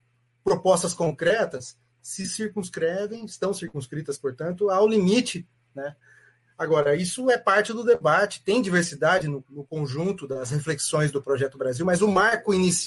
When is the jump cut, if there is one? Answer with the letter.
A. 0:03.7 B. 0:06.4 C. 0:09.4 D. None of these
C